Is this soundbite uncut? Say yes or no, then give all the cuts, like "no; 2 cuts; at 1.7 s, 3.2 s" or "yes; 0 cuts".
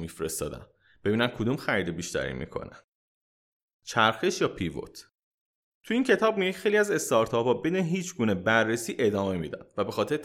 yes; 0 cuts